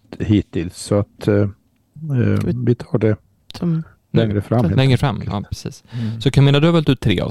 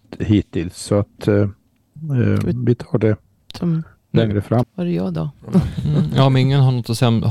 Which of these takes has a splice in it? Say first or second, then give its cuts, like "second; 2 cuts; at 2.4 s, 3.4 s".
second; 1 cut; at 4.6 s